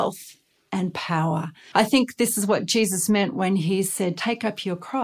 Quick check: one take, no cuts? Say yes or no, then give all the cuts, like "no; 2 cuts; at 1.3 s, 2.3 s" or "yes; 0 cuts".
no; 1 cut; at 1.7 s